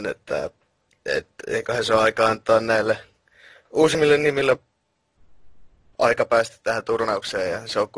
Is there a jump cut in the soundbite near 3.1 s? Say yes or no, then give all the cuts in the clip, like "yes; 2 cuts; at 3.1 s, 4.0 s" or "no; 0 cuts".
no; 0 cuts